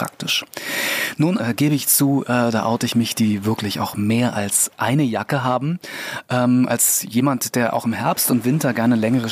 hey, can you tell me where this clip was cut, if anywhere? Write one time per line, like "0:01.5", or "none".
0:01.4